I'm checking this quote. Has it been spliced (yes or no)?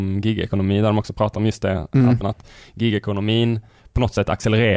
yes